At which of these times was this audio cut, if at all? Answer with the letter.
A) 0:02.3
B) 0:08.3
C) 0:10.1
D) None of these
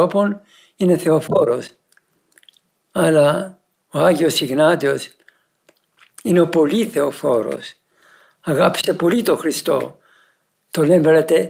D